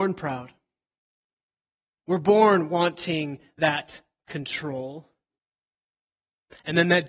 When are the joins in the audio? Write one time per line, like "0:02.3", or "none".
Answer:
0:05.4